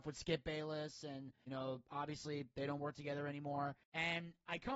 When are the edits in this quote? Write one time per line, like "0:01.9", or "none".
none